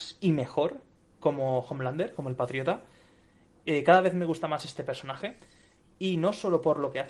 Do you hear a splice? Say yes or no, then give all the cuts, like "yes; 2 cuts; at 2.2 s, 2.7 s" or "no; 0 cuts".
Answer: no; 0 cuts